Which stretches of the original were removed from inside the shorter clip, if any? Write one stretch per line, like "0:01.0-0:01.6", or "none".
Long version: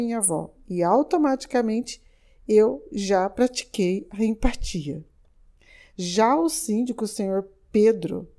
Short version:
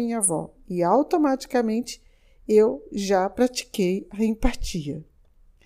none